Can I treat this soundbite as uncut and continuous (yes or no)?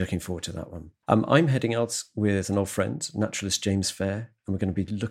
yes